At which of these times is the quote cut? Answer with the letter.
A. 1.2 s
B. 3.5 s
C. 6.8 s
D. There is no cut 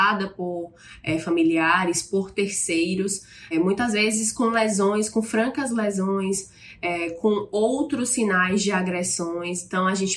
B